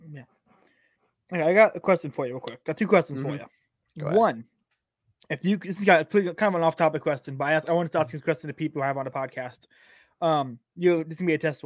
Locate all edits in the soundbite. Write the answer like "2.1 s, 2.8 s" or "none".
none